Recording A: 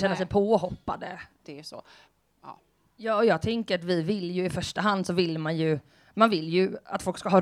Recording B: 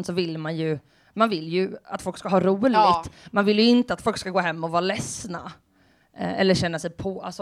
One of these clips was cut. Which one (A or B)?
A